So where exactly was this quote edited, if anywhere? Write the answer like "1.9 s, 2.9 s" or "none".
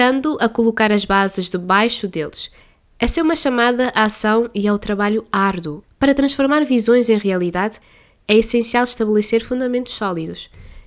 5.8 s

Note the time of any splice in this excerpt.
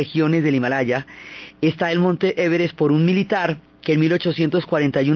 none

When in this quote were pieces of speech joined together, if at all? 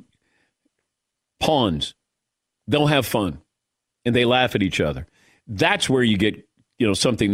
none

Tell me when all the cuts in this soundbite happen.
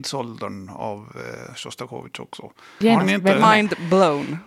2.8 s

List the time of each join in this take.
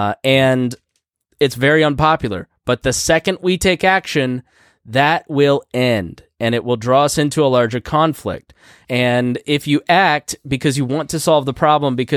8.8 s

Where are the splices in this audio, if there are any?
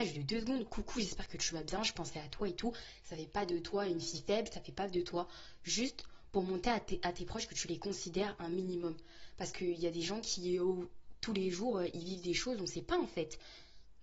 none

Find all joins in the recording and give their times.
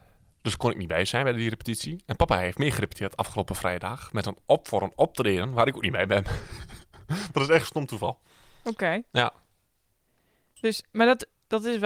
none

